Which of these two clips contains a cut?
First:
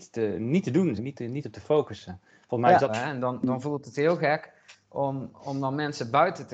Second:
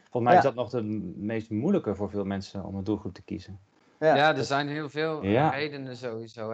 first; 2 cuts; at 1.0 s, 2.9 s

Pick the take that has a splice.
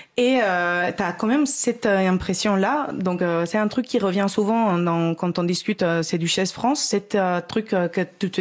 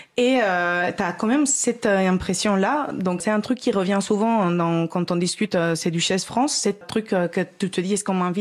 second; 2 cuts; at 3.2 s, 6.8 s

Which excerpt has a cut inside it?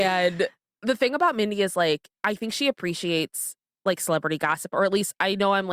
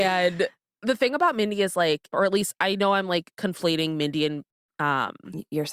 second; 2 cuts; at 2.1 s, 3.3 s

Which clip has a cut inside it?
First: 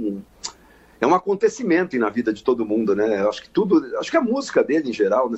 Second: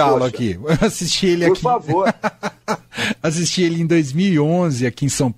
first; 1 cut; at 1.9 s

